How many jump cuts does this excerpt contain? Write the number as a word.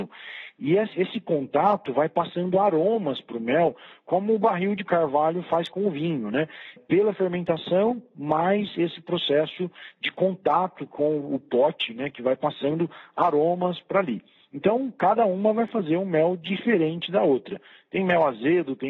one